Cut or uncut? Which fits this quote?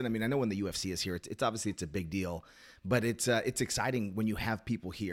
uncut